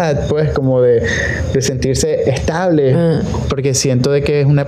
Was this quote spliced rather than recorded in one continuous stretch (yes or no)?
yes